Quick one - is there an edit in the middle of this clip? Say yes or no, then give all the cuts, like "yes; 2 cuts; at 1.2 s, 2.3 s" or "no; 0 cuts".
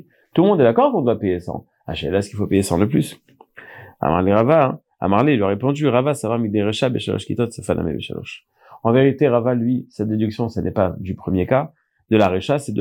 no; 0 cuts